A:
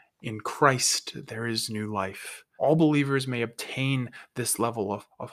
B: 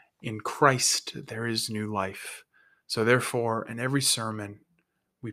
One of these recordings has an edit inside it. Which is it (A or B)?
A